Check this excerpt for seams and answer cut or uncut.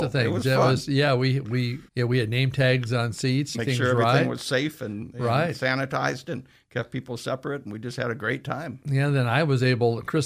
cut